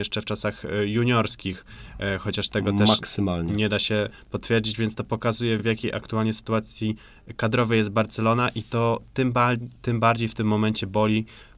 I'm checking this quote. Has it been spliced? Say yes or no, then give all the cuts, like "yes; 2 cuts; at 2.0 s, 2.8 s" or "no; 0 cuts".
no; 0 cuts